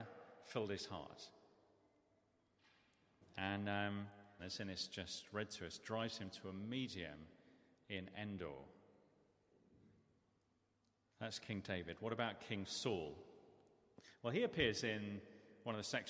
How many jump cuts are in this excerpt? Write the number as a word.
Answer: two